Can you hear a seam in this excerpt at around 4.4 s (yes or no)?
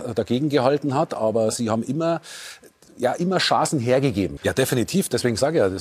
yes